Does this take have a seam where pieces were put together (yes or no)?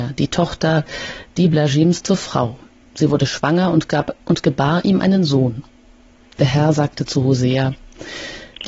no